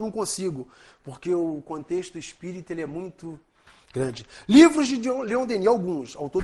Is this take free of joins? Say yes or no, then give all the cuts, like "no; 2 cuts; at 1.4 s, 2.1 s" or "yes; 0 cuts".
yes; 0 cuts